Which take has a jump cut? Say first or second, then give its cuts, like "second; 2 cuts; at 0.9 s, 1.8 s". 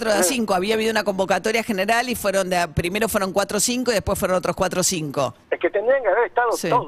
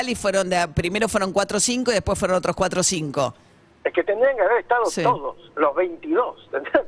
first; 1 cut; at 5.4 s